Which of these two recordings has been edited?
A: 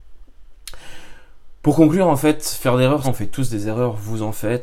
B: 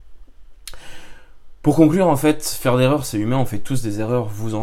A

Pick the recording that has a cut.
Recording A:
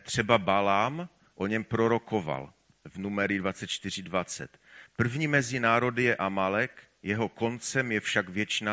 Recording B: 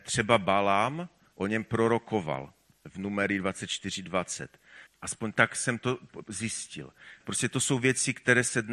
B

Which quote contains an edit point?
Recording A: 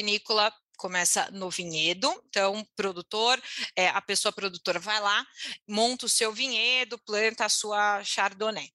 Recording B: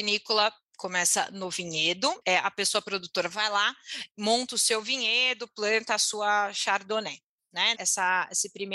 B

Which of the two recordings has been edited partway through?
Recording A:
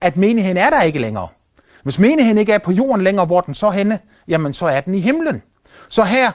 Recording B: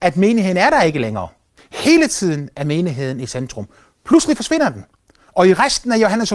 B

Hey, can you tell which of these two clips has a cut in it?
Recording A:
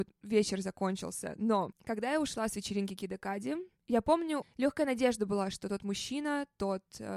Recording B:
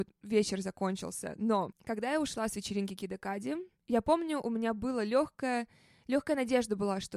A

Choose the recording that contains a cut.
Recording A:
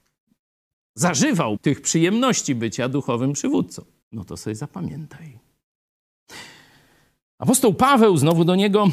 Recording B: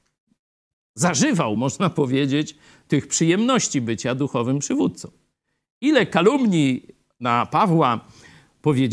A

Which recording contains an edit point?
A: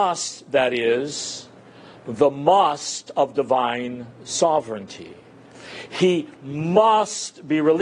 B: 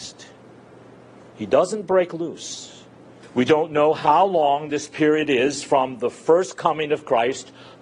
B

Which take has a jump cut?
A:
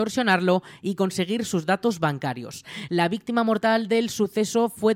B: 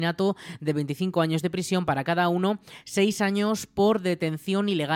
A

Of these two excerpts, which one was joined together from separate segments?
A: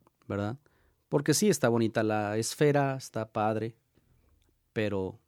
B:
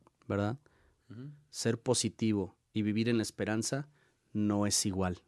B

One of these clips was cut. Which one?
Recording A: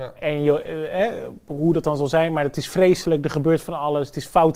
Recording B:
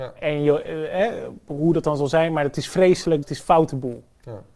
B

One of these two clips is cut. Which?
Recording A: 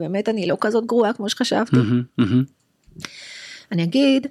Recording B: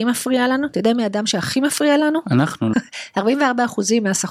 B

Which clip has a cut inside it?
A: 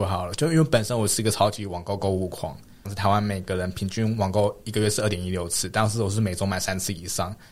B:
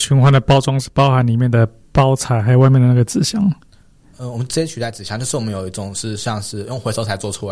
A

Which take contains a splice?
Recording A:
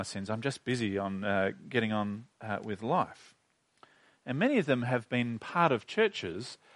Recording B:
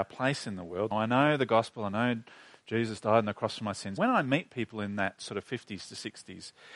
B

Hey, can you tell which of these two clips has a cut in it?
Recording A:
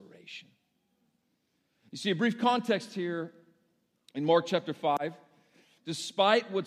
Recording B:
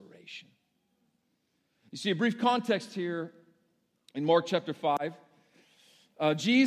A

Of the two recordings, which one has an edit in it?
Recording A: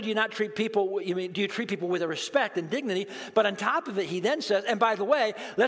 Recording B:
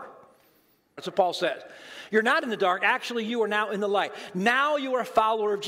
B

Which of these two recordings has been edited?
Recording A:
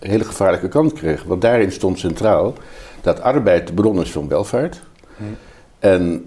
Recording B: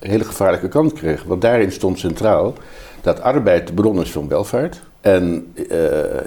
B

